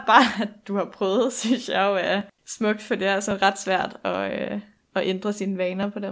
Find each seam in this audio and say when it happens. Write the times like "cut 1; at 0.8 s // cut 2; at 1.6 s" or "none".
none